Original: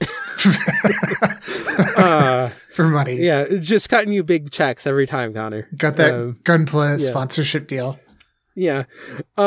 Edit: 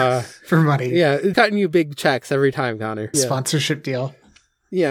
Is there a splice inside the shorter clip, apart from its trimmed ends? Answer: yes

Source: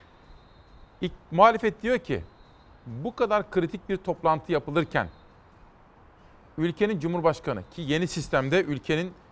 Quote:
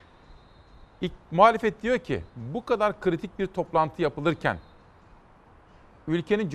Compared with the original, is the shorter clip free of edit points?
no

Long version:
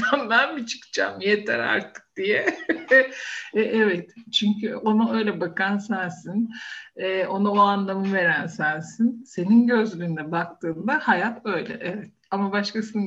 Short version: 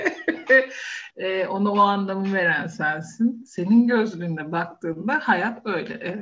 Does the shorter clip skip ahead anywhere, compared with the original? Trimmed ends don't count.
yes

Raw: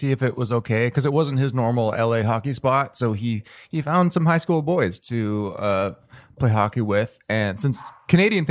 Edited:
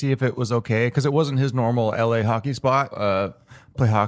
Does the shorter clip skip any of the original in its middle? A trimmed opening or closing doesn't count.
yes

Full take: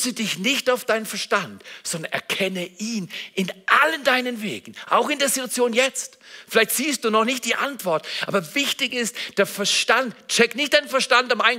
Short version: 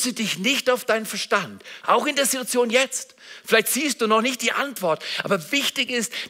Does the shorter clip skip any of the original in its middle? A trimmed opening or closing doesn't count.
yes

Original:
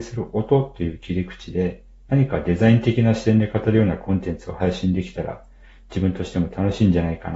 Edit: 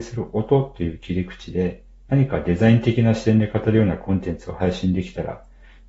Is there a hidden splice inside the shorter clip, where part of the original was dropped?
no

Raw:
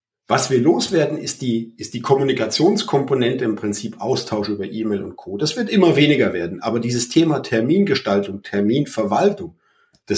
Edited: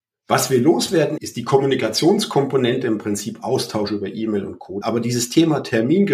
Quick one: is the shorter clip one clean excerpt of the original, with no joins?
no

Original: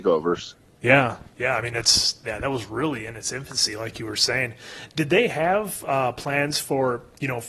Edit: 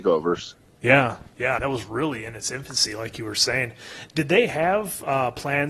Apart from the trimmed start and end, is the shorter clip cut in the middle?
yes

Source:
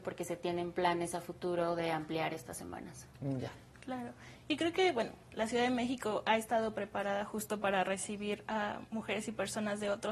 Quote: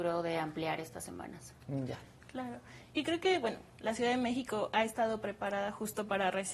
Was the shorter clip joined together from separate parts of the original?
no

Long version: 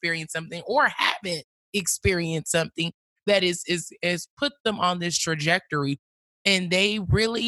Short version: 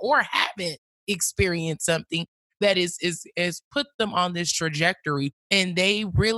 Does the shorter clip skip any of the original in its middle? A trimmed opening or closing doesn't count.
yes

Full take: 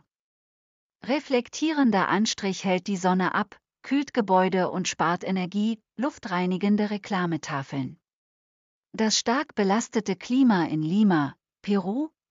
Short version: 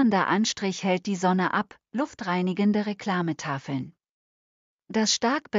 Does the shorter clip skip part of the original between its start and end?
yes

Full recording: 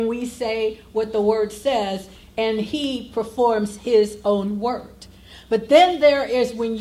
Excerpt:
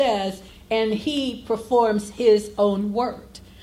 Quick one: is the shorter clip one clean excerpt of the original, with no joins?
yes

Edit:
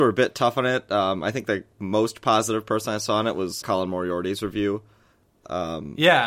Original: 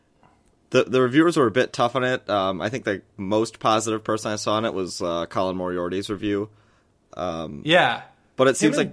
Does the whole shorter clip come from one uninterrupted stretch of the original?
no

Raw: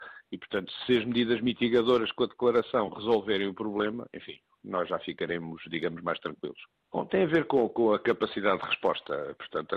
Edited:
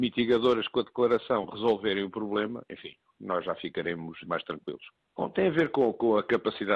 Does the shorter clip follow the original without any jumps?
no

